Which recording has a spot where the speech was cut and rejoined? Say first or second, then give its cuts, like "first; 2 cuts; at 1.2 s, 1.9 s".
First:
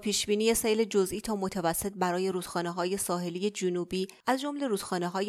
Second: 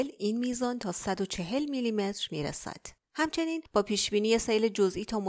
second; 1 cut; at 3.0 s